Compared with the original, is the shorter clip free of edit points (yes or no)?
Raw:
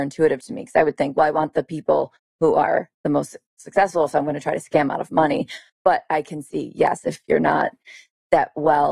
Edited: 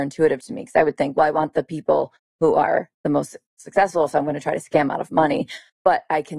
yes